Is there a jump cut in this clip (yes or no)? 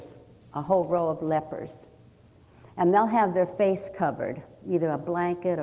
no